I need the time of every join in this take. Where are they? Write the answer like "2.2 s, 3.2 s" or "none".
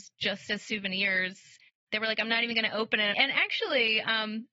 3.1 s